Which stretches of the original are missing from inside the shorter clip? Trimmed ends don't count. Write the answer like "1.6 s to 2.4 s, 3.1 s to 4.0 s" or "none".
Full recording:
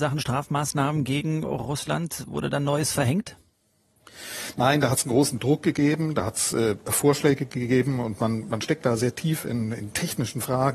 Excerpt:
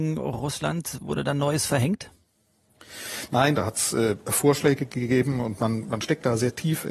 4.8 s to 6.1 s